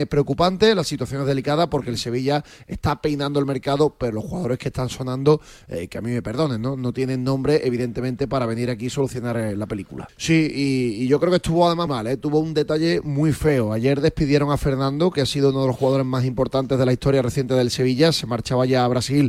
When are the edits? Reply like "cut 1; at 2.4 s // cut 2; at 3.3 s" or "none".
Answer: cut 1; at 10.1 s // cut 2; at 11.9 s